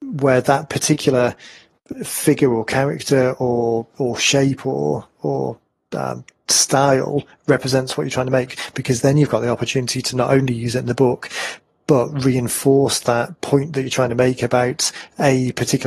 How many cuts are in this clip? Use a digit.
1